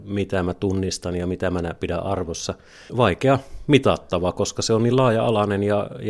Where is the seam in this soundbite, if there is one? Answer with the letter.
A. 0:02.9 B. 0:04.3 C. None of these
A